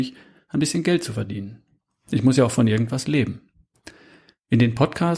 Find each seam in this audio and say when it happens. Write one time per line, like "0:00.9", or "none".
none